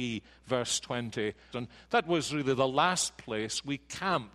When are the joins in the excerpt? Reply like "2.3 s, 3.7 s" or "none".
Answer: 1.5 s